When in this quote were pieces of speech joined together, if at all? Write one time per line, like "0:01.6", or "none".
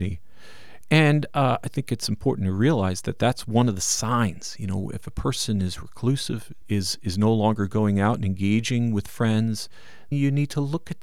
0:06.6
0:10.1